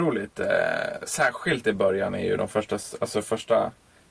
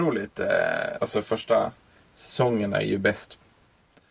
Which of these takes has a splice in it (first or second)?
second